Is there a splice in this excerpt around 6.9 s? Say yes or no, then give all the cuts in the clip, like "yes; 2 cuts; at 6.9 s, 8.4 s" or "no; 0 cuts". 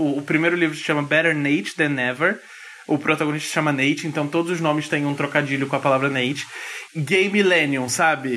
yes; 1 cut; at 6.9 s